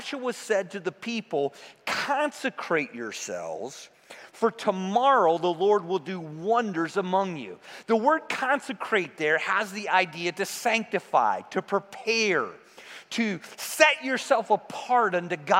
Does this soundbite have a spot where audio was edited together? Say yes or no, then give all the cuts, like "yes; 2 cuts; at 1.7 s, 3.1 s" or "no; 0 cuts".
no; 0 cuts